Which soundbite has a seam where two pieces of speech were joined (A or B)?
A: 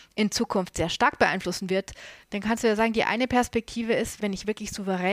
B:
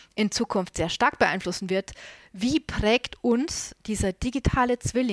A